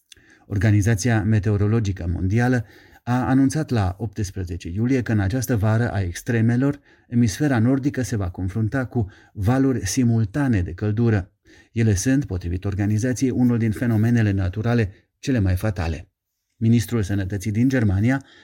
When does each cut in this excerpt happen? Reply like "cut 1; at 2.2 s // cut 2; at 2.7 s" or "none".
none